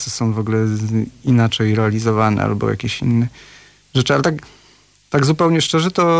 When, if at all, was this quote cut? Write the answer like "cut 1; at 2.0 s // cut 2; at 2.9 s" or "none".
none